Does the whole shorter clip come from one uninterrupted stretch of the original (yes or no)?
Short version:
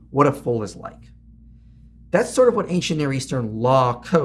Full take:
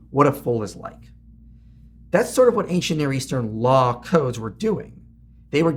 yes